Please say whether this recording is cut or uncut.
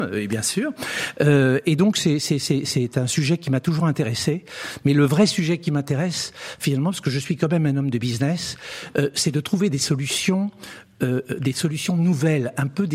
uncut